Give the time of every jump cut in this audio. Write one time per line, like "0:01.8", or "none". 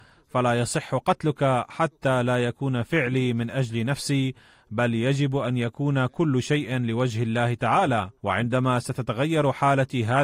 0:08.2